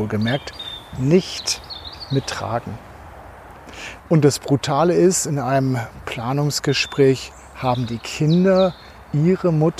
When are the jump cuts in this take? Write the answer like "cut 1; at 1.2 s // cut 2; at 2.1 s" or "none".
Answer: cut 1; at 4.0 s